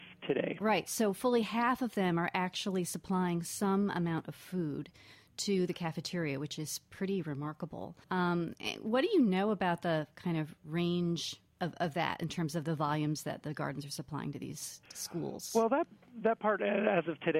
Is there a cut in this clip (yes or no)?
yes